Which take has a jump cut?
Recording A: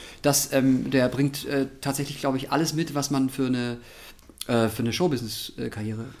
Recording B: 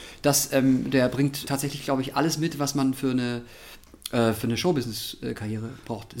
B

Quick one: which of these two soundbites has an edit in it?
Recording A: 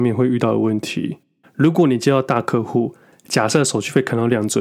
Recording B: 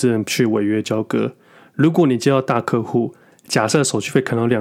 A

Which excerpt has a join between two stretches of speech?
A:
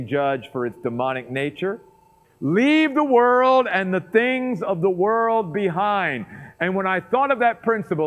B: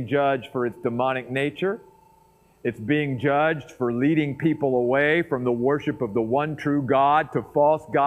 A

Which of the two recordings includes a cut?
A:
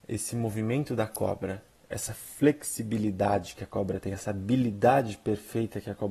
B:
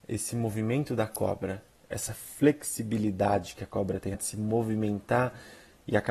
B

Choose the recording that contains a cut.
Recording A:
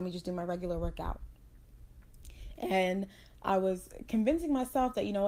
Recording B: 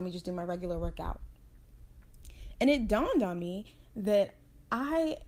A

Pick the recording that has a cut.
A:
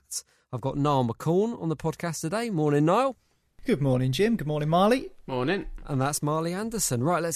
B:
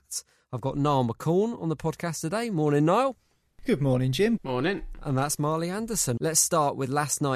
B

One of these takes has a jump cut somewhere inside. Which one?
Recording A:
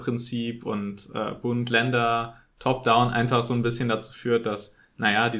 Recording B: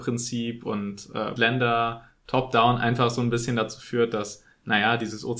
B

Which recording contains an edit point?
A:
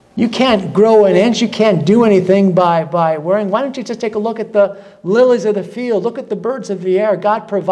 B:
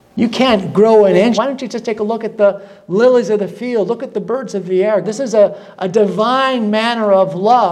B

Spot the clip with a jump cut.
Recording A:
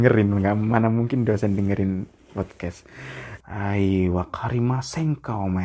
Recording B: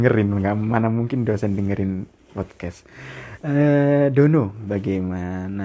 A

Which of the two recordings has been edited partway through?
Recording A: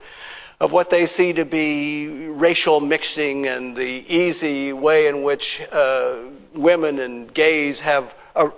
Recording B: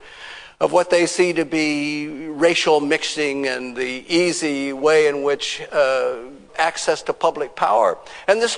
B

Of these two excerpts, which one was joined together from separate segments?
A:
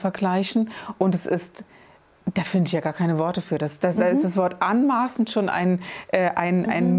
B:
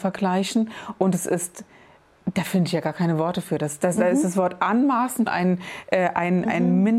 B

